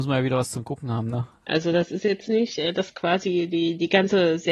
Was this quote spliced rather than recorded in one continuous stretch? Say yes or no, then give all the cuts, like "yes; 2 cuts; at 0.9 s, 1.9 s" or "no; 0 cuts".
yes; 1 cut; at 1.5 s